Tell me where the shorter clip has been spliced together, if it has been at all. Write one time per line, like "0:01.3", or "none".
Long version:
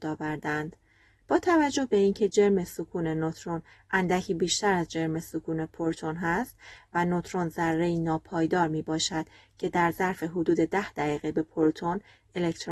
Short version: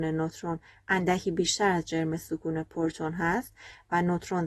none